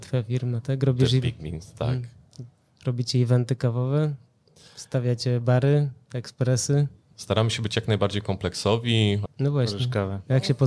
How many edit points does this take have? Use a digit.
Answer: 2